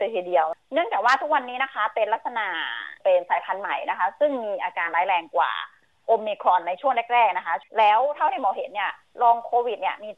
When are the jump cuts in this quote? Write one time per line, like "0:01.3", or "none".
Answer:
0:07.7